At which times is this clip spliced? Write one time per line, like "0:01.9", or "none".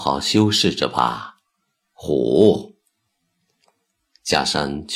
none